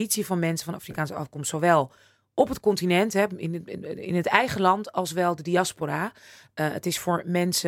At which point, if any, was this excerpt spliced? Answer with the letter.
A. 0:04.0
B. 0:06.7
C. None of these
C